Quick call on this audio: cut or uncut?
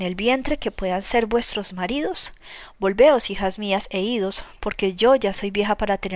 uncut